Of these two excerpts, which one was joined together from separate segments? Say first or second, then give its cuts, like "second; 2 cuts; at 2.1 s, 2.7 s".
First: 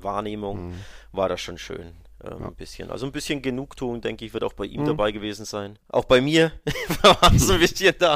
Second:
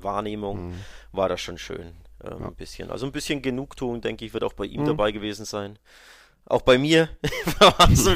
first; 1 cut; at 5.8 s